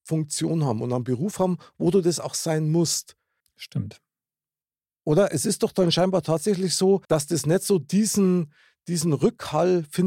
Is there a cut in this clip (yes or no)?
yes